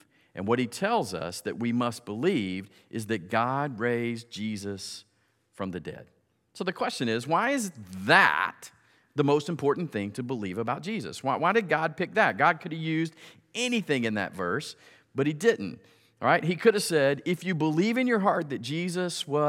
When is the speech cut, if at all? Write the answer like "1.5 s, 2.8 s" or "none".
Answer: none